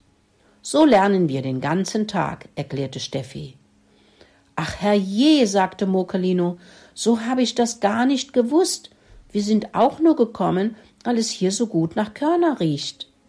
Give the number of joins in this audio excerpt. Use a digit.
0